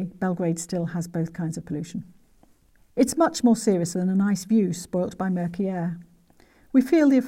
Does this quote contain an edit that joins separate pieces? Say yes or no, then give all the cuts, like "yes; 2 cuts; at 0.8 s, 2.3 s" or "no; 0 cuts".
yes; 2 cuts; at 2.8 s, 3.9 s